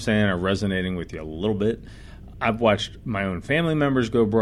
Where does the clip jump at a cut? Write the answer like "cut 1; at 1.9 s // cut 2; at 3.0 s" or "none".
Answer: cut 1; at 2.3 s